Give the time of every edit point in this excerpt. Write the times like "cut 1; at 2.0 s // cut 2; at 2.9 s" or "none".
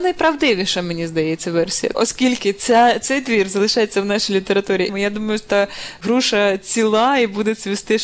cut 1; at 1.9 s // cut 2; at 4.9 s

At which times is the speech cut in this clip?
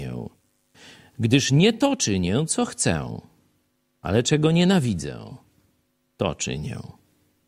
none

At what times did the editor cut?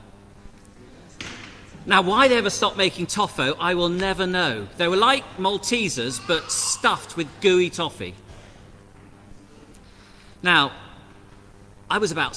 none

